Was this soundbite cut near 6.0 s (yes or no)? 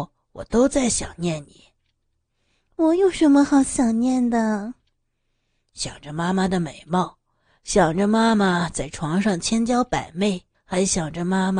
no